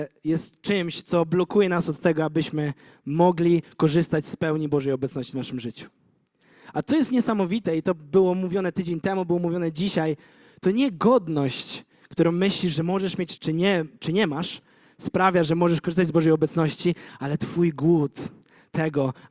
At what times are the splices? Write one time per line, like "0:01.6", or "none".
0:13.4